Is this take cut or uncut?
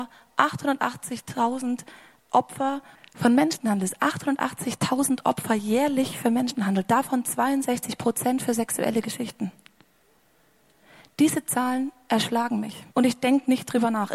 cut